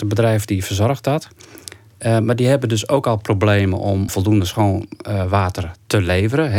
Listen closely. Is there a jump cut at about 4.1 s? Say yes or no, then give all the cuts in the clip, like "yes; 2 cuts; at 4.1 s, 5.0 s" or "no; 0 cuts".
yes; 1 cut; at 4.1 s